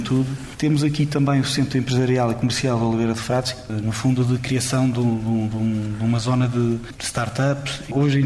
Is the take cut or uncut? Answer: uncut